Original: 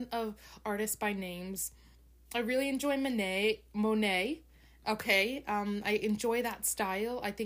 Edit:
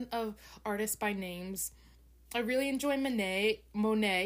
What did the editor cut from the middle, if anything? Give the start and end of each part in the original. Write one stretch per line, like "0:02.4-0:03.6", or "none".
none

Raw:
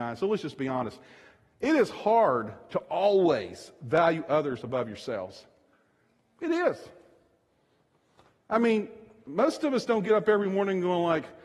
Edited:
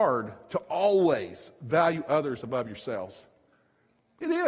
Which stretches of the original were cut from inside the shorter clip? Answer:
none

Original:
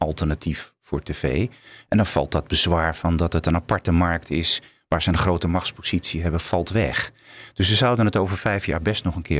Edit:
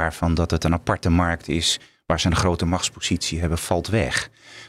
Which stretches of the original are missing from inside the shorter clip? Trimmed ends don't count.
none

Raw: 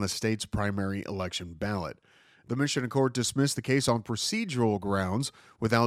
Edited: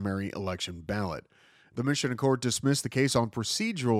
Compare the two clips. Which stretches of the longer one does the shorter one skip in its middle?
none

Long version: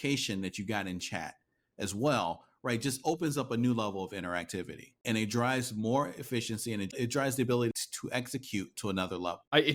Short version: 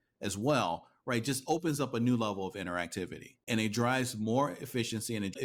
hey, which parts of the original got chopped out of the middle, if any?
none

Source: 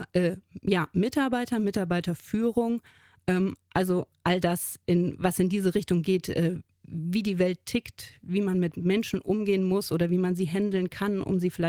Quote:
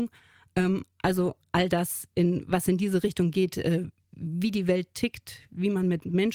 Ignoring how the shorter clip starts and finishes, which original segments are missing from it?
none

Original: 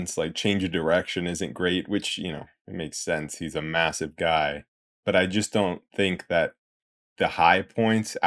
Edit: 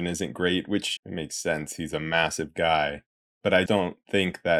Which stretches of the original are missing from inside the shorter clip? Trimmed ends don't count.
0:02.2-0:02.6
0:05.3-0:05.5

